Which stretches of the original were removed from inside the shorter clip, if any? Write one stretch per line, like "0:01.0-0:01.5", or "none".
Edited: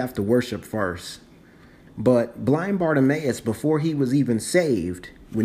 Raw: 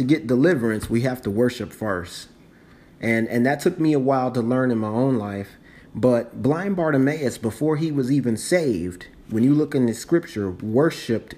0:02.9-0:05.8